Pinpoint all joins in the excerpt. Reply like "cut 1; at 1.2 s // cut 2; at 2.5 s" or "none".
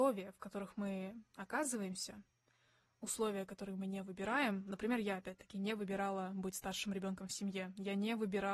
none

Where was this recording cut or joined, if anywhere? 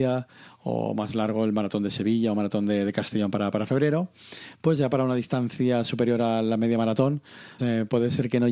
cut 1; at 7.6 s

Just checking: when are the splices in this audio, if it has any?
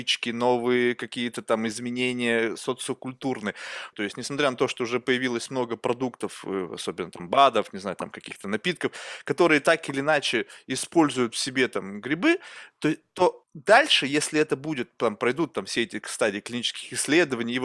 cut 1; at 3.9 s // cut 2; at 13.4 s

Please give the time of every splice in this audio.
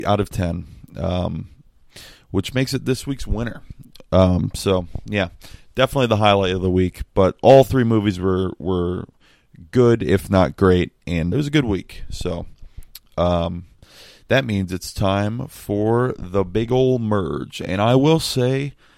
cut 1; at 11.3 s

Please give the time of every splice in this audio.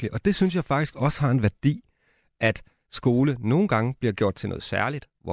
none

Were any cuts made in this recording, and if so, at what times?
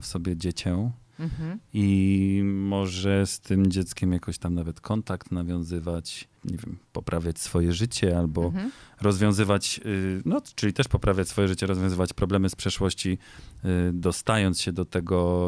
cut 1; at 6.4 s

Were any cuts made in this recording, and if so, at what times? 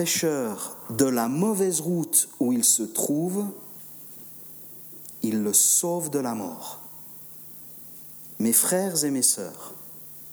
cut 1; at 8.3 s

